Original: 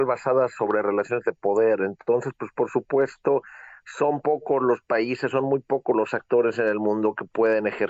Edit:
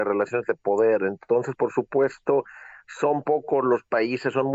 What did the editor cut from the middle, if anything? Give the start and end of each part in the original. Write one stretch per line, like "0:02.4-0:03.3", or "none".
0:02.3-0:02.5